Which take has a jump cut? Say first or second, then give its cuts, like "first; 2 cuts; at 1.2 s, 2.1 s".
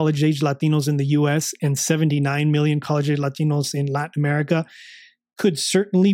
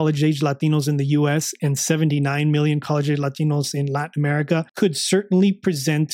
second; 1 cut; at 4.7 s